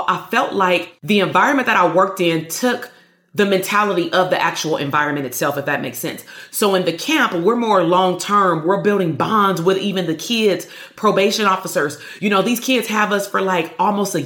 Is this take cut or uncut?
uncut